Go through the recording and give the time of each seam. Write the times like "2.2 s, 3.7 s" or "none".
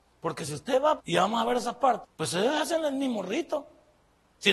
1.0 s, 2.0 s